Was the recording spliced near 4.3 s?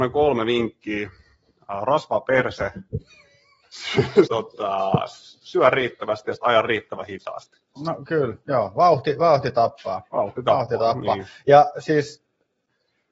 yes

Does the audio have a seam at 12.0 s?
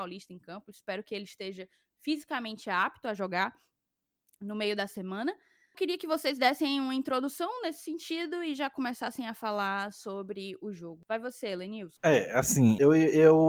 no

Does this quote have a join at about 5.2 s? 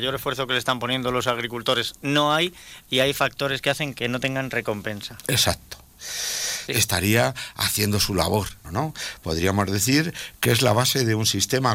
no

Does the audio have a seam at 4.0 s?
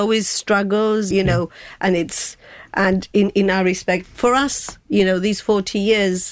yes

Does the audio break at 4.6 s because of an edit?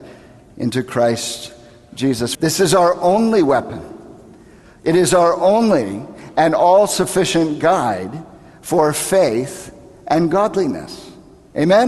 no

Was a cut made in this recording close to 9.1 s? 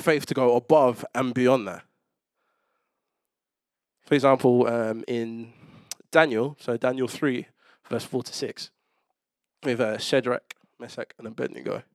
no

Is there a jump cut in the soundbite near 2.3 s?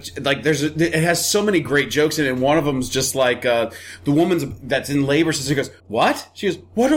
no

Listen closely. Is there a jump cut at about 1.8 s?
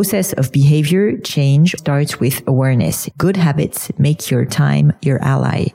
yes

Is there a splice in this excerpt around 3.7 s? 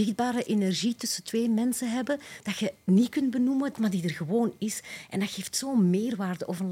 yes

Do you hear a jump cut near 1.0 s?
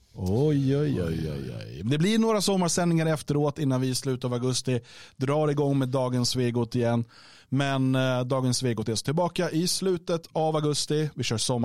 no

